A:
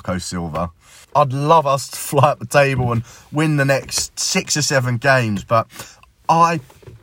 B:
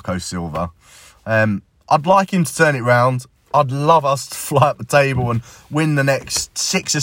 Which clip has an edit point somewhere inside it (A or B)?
A